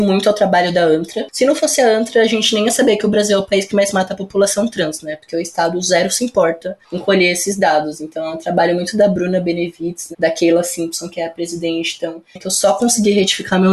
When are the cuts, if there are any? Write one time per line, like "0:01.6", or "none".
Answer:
0:12.4